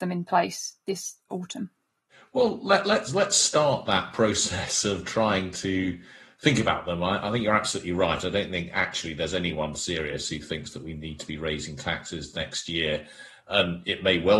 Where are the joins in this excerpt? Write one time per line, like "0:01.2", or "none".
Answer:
none